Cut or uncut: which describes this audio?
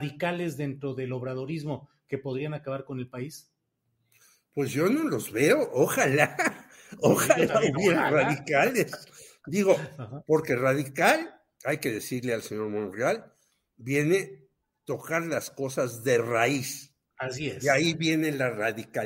uncut